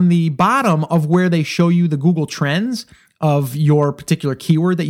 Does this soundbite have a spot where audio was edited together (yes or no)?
no